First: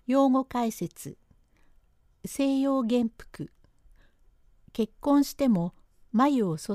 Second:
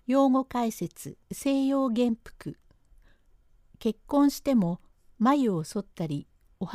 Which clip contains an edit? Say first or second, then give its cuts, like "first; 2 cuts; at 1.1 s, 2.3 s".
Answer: second; 1 cut; at 1.2 s